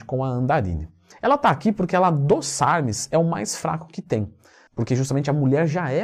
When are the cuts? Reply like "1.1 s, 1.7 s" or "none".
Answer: 1.1 s, 4.7 s